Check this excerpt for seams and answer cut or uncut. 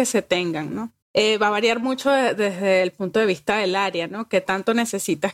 cut